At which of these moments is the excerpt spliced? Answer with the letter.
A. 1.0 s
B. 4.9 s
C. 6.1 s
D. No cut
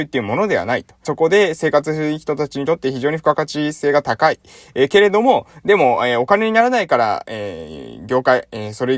A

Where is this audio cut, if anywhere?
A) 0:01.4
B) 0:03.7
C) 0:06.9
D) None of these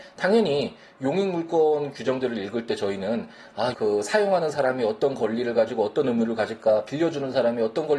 B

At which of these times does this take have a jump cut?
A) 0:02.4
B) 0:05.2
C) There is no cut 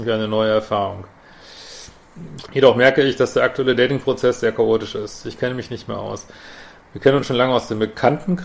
A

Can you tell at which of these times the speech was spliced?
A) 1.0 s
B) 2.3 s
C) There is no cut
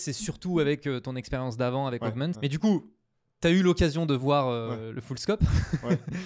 B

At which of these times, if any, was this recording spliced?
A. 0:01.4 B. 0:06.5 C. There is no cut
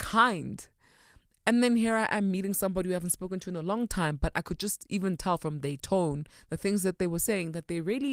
A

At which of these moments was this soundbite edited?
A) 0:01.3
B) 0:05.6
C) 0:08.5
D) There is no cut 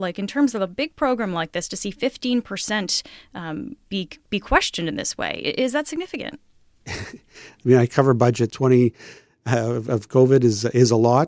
C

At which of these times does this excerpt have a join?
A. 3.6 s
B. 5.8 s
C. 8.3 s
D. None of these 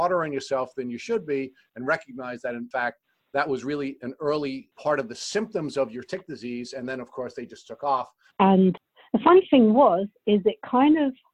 C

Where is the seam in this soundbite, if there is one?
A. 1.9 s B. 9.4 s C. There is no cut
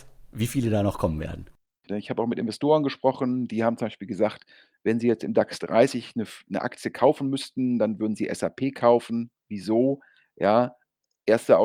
A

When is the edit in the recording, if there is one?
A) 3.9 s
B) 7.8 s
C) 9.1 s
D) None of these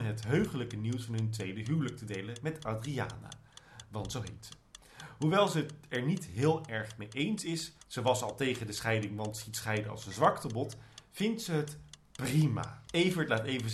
B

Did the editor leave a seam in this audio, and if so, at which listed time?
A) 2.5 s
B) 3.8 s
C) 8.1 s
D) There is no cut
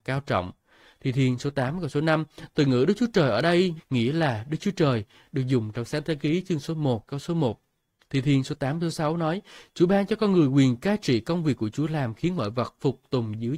B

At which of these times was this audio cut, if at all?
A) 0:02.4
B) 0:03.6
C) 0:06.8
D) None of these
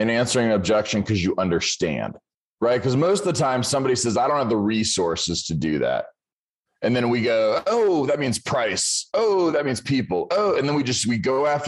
A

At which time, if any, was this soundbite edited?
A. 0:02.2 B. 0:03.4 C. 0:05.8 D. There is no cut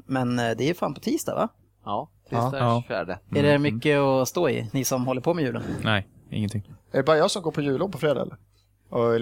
A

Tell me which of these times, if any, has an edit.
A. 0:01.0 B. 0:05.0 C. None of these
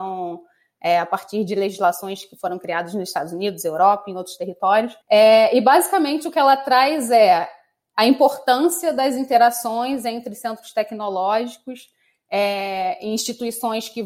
B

